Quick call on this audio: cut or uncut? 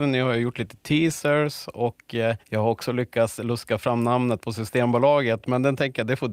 uncut